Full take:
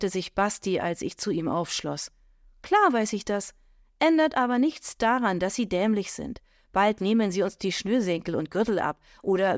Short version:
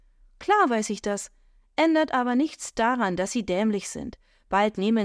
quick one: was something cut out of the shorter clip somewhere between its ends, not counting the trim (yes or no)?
no